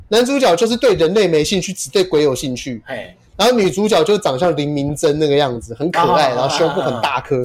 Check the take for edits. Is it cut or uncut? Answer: uncut